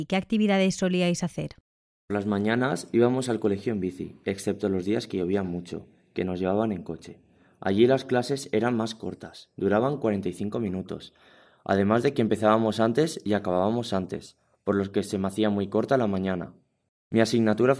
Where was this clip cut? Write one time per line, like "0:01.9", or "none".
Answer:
none